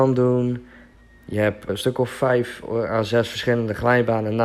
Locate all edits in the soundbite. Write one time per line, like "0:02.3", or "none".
0:01.7